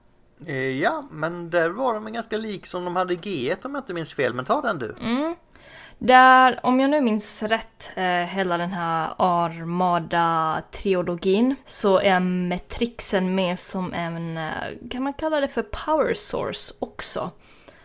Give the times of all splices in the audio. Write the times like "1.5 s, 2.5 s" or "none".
11.6 s